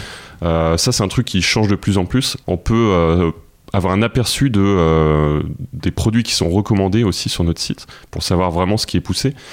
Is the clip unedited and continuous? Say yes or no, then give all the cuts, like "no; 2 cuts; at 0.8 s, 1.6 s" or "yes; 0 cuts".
no; 1 cut; at 2.4 s